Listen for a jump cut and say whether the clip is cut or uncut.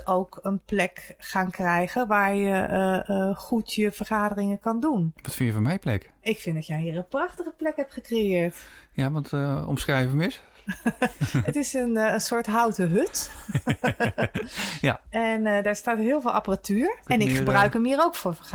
cut